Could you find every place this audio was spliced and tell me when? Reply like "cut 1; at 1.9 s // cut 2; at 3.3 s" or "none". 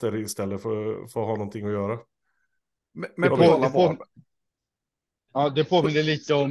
none